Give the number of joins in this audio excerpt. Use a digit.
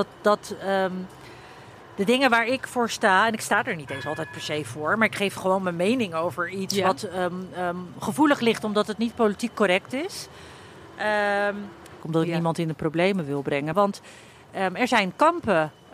2